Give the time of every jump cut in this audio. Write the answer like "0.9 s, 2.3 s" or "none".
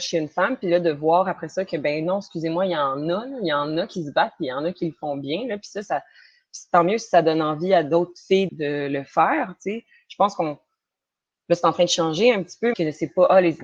8.5 s, 12.7 s